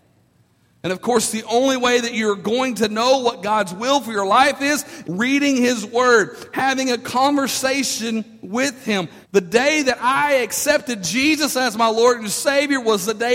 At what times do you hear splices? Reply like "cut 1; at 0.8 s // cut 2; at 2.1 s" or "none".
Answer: cut 1; at 5.0 s // cut 2; at 9.2 s

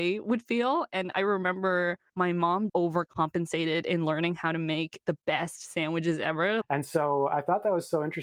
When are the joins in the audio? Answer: cut 1; at 2.7 s // cut 2; at 6.6 s

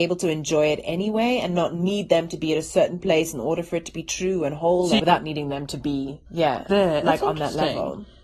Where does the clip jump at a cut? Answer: cut 1; at 5.0 s // cut 2; at 6.3 s

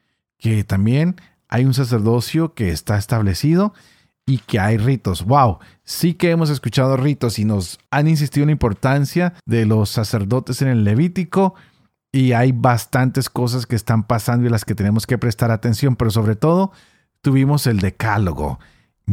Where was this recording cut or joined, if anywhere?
cut 1; at 7.9 s // cut 2; at 9.4 s

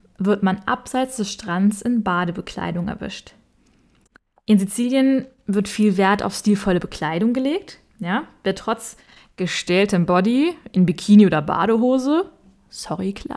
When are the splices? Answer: cut 1; at 4.4 s

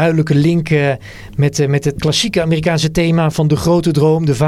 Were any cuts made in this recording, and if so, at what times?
cut 1; at 2.0 s // cut 2; at 3.3 s

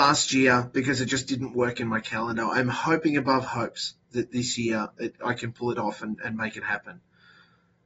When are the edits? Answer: none

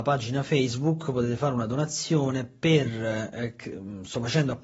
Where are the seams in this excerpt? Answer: none

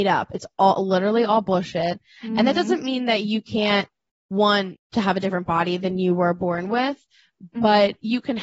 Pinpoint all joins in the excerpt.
none

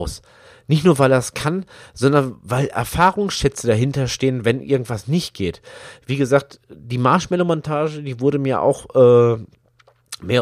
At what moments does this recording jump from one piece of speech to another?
none

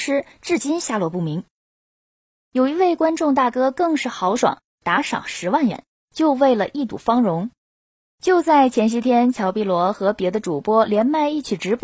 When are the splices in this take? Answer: cut 1; at 2.4 s

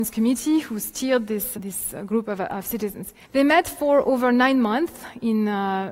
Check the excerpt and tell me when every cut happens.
cut 1; at 1.5 s // cut 2; at 3.2 s

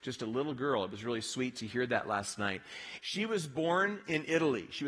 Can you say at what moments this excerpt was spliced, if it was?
cut 1; at 3.0 s

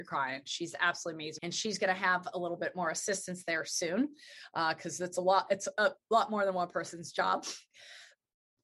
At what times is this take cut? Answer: cut 1; at 1.4 s

